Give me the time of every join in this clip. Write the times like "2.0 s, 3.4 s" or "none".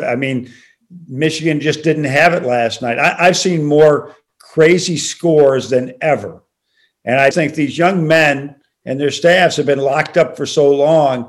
7.3 s